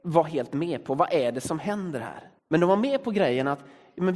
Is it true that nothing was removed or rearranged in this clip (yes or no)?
no